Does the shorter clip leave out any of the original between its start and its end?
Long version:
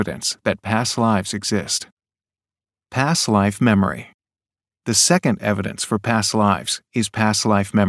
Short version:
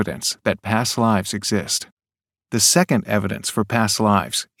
yes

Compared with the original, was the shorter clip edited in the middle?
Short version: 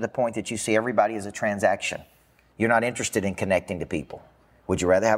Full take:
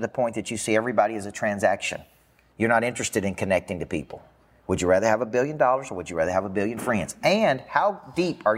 no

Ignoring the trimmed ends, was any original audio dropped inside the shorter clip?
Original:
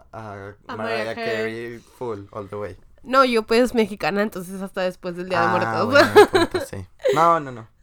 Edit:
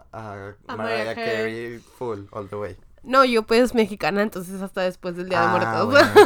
no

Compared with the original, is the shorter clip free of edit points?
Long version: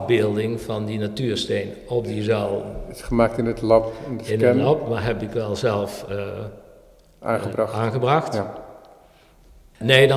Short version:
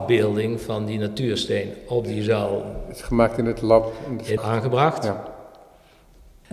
no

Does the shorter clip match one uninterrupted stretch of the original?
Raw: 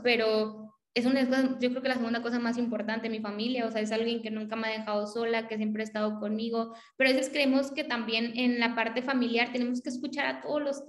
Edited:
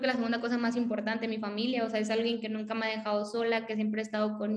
yes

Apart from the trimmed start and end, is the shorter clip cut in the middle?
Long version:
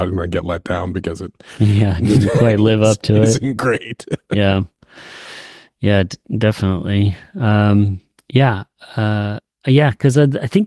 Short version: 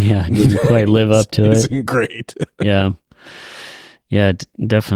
no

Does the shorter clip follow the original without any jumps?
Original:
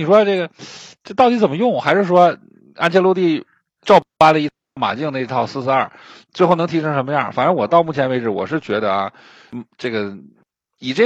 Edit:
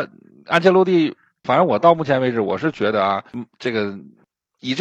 no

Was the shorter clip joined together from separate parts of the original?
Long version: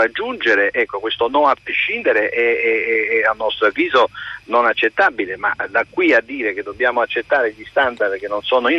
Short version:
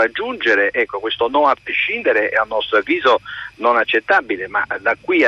yes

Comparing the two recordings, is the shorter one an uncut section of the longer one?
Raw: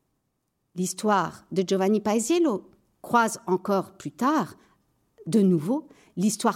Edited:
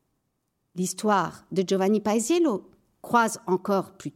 yes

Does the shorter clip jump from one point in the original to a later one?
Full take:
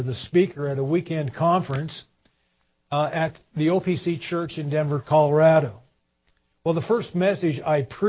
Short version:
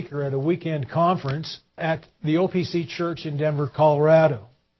yes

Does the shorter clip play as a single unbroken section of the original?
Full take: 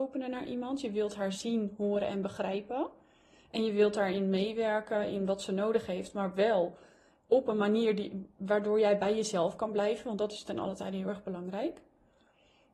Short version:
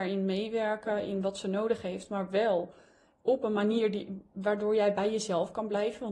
yes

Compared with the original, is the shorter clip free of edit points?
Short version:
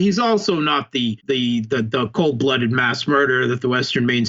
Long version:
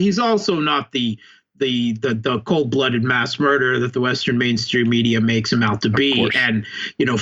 no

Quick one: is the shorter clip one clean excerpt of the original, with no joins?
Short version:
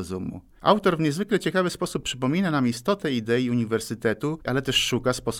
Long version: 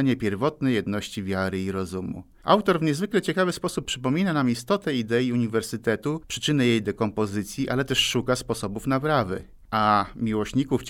no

